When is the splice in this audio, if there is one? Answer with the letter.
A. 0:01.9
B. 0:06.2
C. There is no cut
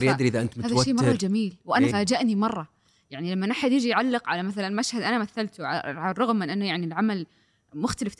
A